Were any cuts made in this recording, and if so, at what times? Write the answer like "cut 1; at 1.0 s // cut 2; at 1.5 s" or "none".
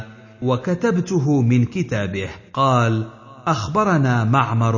cut 1; at 2.5 s